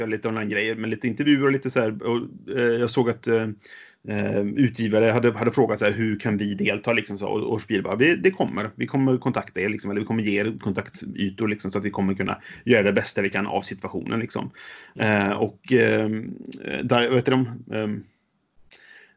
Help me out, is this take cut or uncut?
uncut